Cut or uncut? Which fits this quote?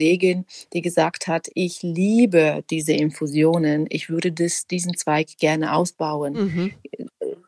uncut